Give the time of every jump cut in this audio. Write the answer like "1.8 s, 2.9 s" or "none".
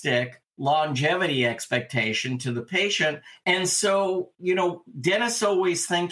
3.4 s